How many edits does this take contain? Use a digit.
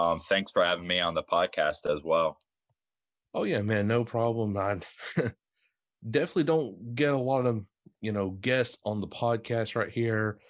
0